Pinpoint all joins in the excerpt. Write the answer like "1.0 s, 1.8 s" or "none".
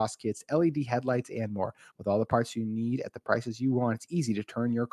1.9 s